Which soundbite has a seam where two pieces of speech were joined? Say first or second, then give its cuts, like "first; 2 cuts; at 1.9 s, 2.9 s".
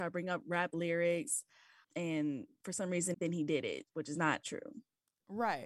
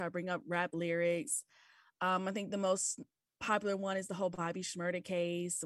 first; 3 cuts; at 1.8 s, 3.1 s, 4.4 s